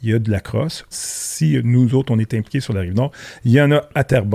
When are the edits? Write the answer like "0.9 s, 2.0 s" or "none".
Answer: 0.9 s